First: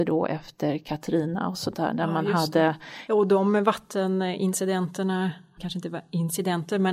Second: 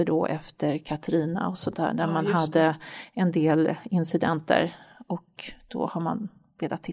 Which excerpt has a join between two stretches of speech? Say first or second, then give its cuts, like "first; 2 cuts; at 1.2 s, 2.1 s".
first; 2 cuts; at 3.1 s, 5.6 s